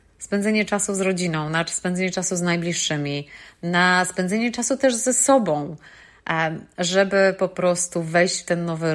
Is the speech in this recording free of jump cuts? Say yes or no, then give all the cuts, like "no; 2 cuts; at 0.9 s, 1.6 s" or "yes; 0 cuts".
yes; 0 cuts